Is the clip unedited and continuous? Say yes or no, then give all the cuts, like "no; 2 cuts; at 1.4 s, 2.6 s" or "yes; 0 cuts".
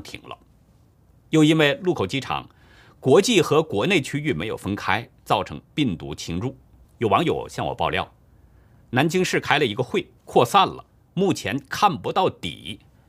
no; 2 cuts; at 6.8 s, 10.2 s